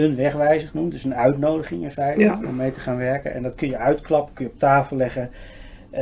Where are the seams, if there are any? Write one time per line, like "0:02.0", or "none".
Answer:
none